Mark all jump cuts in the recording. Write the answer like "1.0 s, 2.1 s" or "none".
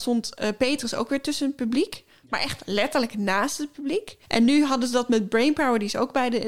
4.2 s